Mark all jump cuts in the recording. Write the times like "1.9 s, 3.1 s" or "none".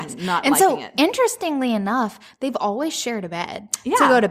none